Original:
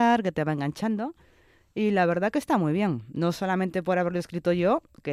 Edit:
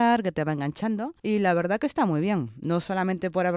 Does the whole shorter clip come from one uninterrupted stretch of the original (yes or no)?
no